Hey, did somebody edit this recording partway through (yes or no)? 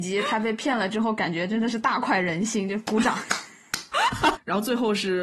yes